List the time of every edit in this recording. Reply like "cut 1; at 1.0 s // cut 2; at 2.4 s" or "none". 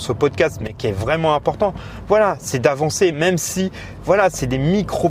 cut 1; at 3.1 s